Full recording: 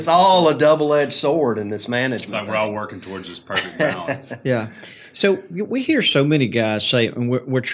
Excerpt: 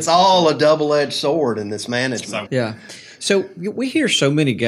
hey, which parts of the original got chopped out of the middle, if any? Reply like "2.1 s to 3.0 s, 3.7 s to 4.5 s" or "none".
2.5 s to 4.4 s